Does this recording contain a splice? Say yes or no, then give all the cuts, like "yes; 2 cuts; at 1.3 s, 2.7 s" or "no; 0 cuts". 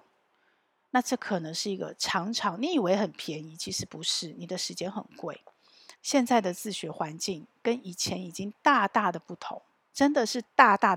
yes; 1 cut; at 5.9 s